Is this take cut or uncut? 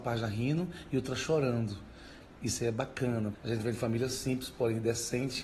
cut